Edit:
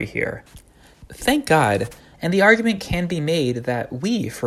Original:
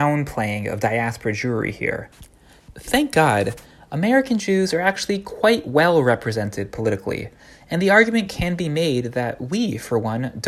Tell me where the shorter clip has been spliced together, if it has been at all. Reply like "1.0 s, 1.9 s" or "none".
2.1 s